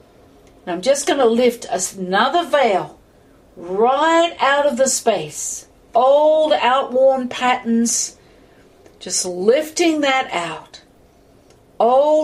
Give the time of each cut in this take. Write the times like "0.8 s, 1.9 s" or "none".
none